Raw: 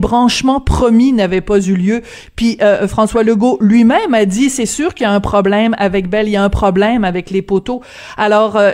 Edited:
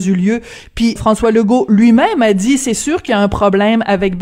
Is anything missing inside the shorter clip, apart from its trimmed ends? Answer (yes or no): yes